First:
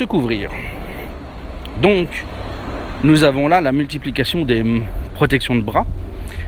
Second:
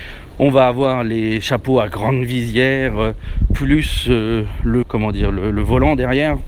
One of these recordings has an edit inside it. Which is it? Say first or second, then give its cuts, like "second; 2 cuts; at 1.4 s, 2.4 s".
second; 1 cut; at 4.8 s